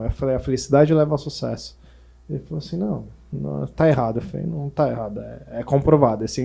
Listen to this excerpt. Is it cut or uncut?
uncut